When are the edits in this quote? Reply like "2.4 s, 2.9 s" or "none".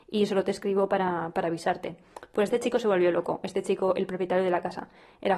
none